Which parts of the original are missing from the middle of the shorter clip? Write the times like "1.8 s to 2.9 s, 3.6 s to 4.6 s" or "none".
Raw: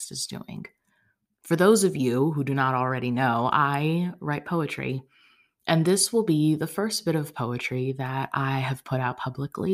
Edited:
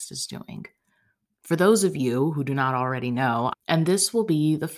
3.5 s to 5.5 s